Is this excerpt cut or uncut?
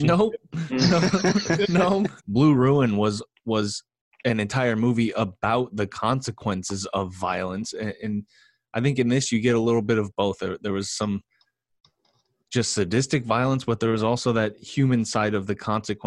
cut